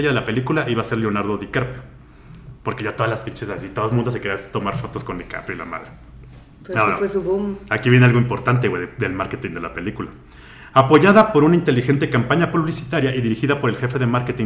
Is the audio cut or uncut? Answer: uncut